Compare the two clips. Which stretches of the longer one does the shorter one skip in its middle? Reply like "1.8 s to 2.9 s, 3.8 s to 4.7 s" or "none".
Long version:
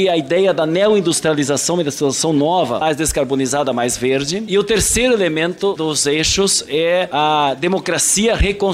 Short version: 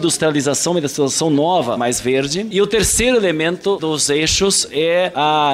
2.8 s to 3.7 s

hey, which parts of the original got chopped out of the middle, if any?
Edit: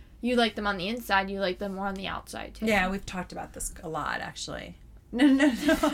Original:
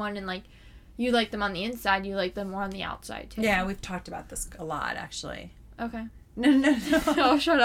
5.7 s to 6.2 s

